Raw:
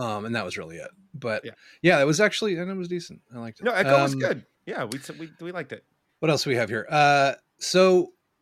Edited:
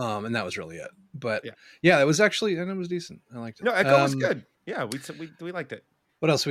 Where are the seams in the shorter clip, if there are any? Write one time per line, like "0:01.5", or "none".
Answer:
none